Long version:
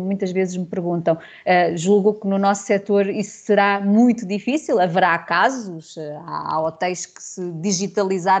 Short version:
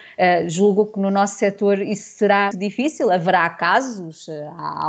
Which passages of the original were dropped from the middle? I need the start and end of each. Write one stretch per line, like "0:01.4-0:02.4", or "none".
0:03.8-0:04.2